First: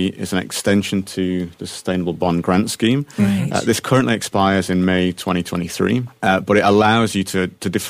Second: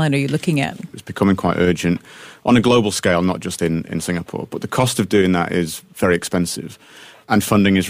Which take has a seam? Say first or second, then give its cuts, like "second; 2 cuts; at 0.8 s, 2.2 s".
second; 1 cut; at 0.9 s